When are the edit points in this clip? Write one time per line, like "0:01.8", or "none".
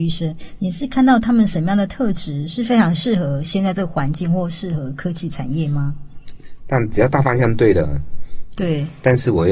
0:06.6
0:08.5